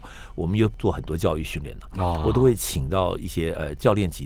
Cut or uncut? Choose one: uncut